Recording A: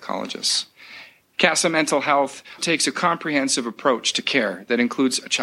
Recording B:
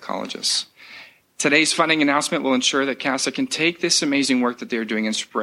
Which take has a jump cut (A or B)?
A